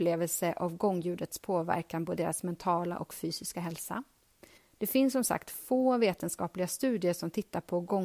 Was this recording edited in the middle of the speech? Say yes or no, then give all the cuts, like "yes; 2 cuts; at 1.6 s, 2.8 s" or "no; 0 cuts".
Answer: yes; 1 cut; at 4.6 s